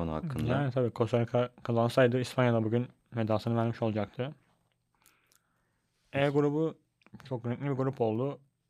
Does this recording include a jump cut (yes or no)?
no